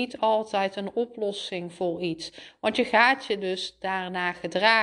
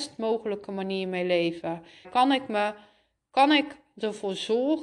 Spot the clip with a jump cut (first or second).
second